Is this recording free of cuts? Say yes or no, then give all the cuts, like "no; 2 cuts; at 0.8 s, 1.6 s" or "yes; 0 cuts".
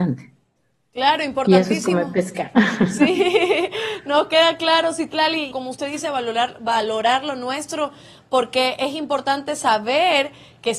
no; 1 cut; at 5.5 s